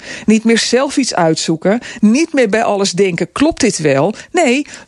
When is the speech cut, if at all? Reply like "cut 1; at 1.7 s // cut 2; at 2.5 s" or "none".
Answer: cut 1; at 2.0 s